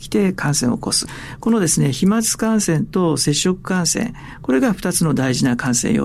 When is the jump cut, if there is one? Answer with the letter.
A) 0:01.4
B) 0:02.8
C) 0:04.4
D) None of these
A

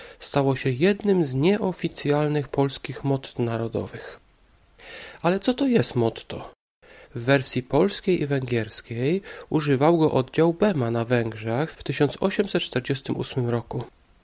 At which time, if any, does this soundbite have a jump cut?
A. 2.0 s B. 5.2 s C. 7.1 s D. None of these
C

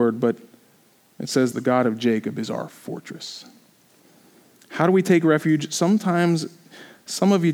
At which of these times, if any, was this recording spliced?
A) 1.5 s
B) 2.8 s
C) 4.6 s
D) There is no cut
A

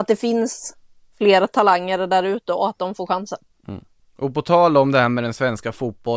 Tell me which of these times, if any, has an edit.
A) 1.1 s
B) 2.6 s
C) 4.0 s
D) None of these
D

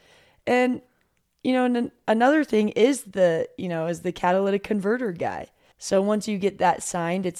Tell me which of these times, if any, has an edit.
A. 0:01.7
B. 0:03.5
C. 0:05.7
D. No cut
C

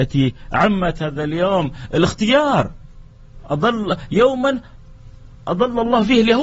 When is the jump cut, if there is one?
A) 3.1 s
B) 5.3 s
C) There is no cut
B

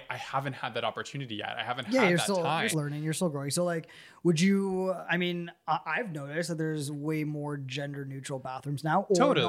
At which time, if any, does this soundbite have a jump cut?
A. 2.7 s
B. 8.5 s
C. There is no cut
A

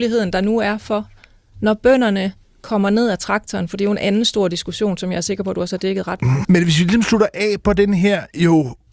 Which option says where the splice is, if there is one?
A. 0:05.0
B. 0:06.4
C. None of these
B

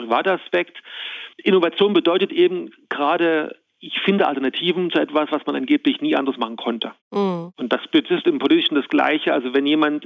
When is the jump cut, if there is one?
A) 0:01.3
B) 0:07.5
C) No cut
A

